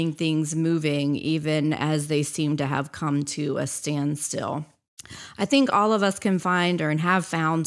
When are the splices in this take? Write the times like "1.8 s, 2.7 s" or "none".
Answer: none